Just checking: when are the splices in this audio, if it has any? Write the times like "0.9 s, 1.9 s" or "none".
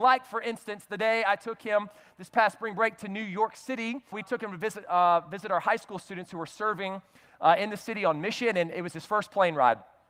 4.1 s